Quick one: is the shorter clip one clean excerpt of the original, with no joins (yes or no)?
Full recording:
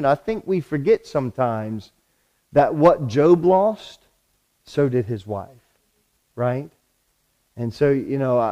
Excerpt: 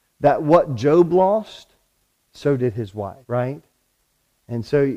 no